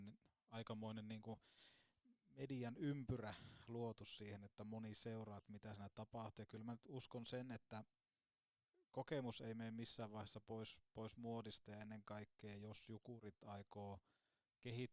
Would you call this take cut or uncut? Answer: uncut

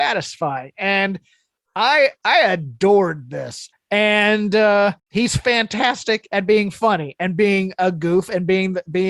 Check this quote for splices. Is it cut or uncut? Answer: cut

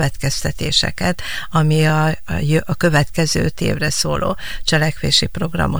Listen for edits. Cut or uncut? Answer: uncut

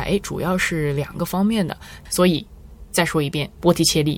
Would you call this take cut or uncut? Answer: cut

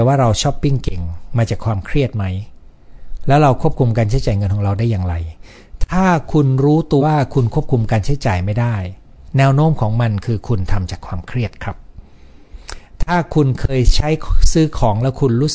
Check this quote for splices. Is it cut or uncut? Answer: cut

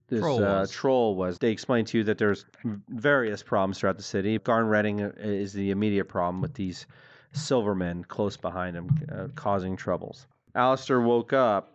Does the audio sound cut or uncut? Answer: cut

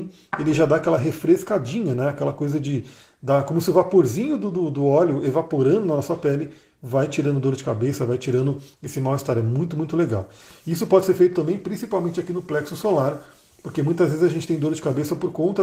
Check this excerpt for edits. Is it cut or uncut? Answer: uncut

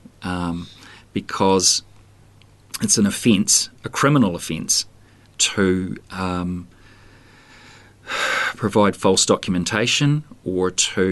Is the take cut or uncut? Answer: uncut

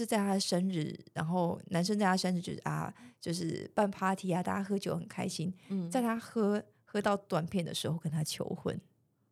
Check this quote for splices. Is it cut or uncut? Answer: uncut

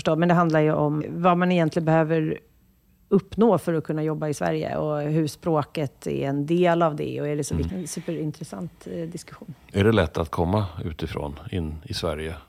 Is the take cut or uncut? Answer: cut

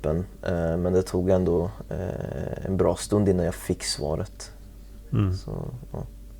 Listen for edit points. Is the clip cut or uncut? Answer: uncut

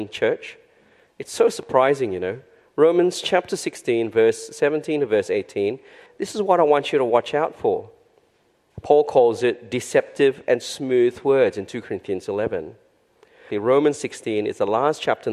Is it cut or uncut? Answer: cut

